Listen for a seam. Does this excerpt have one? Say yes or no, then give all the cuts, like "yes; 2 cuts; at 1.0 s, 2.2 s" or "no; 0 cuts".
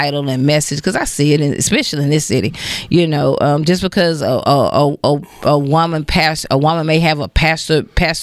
no; 0 cuts